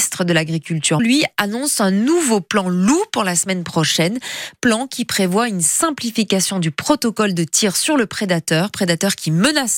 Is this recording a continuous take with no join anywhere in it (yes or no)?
no